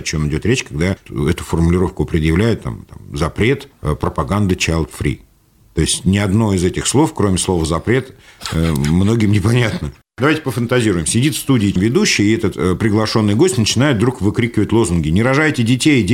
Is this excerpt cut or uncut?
uncut